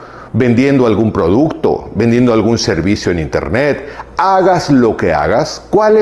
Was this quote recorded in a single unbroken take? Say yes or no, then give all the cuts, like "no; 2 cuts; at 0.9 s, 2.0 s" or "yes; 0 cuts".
yes; 0 cuts